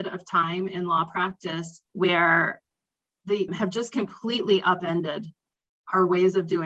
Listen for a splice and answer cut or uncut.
cut